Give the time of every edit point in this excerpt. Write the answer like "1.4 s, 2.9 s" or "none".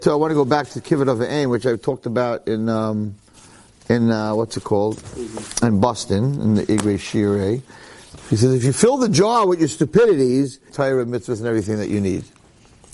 8.2 s, 10.7 s